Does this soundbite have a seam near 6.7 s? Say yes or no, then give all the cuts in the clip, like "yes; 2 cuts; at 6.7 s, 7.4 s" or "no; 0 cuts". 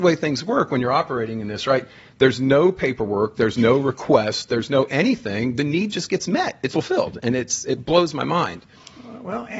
yes; 1 cut; at 6.7 s